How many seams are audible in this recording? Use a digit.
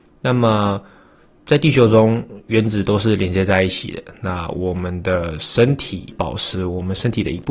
1